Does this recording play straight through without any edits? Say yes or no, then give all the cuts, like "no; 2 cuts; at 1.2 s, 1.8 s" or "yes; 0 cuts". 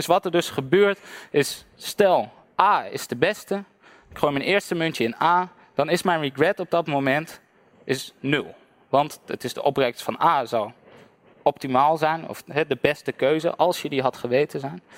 yes; 0 cuts